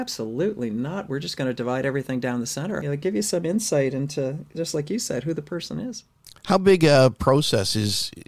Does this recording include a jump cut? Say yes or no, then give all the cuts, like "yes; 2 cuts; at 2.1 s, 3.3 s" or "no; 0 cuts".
yes; 1 cut; at 2.8 s